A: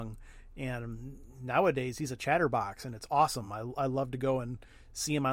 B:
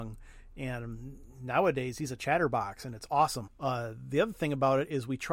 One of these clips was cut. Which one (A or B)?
B